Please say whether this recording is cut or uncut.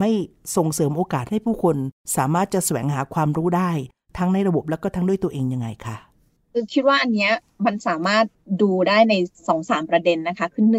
uncut